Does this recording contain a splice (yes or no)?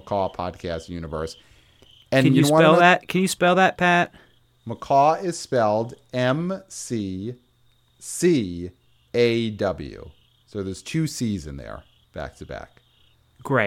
no